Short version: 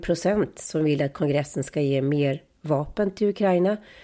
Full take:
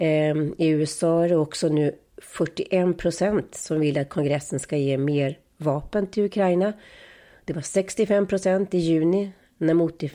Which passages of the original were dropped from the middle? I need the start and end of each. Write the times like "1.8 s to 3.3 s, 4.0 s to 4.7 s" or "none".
none